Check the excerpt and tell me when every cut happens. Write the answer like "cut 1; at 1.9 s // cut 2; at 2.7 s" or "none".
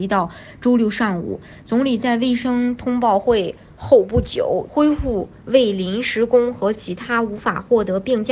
cut 1; at 4.7 s